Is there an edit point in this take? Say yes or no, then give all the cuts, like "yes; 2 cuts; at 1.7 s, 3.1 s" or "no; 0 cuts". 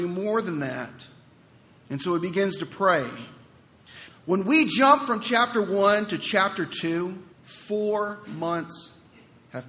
yes; 2 cuts; at 4.1 s, 7.3 s